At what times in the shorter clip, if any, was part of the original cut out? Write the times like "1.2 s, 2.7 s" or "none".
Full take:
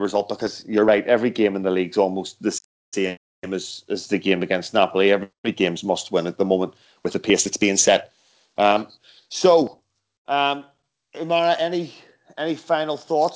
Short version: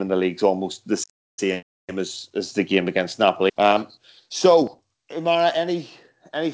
3.5 s, 4.9 s